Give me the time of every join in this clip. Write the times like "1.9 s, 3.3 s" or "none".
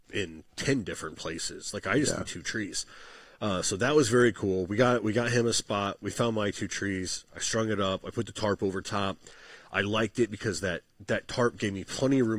none